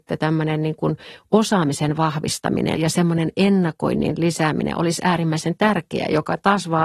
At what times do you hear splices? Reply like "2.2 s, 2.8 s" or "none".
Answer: 2.8 s